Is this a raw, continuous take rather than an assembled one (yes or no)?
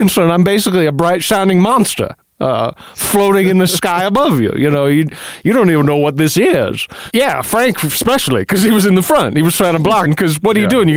no